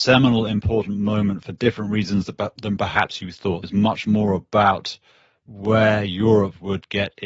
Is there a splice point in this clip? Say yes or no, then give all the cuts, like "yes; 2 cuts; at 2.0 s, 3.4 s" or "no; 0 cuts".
yes; 1 cut; at 3.6 s